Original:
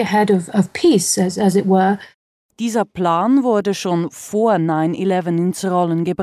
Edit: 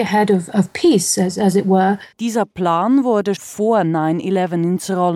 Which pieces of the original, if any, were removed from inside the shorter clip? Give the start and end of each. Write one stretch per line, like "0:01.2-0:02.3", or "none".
0:02.1-0:02.5
0:03.8-0:04.1